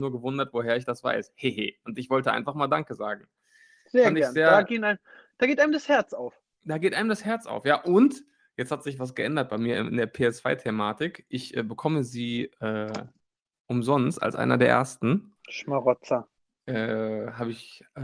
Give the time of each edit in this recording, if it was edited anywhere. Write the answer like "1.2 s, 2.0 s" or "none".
none